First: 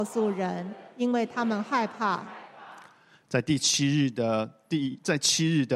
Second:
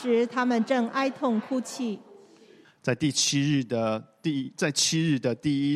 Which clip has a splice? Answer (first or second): second